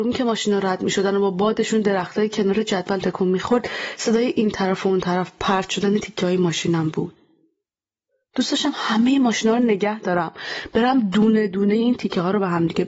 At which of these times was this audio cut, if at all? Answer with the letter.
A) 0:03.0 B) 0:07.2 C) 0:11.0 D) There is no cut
A